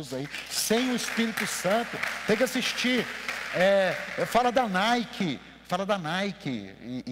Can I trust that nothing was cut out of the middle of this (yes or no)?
yes